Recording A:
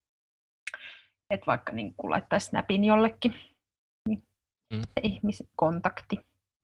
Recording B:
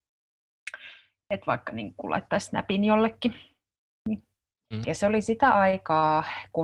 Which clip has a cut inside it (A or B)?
B